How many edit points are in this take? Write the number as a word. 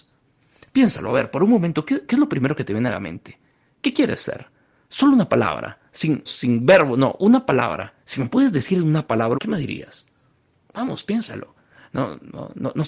three